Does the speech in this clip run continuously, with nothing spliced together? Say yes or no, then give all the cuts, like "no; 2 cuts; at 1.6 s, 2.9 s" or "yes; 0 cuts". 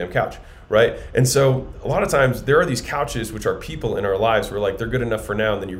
yes; 0 cuts